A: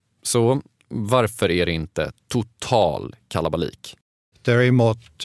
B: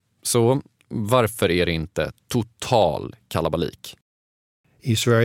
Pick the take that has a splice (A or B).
A